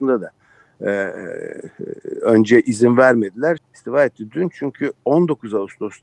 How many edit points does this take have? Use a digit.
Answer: 1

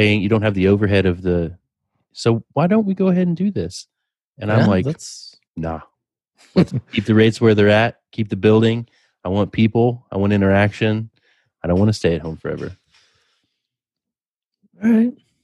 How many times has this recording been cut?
2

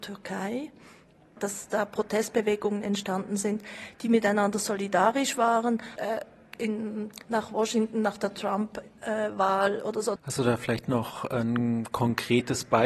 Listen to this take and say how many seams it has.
2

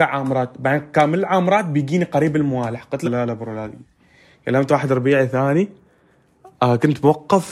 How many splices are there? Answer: 1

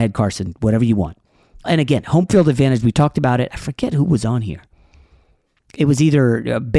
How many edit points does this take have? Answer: 1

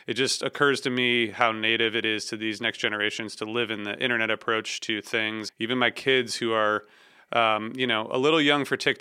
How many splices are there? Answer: 1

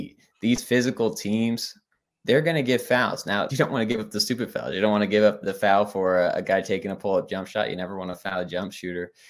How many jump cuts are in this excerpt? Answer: 2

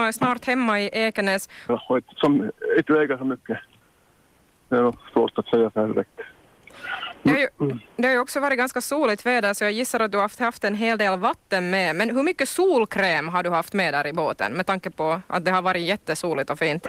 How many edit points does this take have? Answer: 1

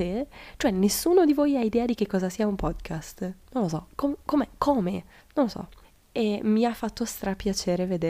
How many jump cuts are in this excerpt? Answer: 1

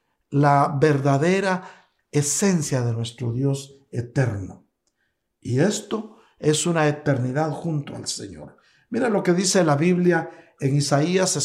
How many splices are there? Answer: 0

